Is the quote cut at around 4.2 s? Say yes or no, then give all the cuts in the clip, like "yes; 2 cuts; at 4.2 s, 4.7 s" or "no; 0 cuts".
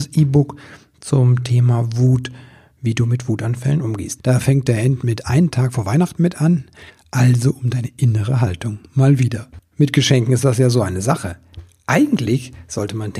yes; 2 cuts; at 4.2 s, 6.9 s